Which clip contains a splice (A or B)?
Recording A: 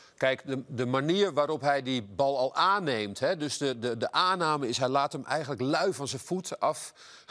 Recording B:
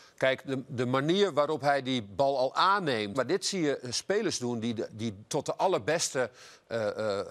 B